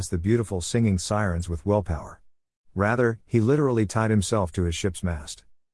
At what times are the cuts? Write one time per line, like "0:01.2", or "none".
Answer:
0:03.2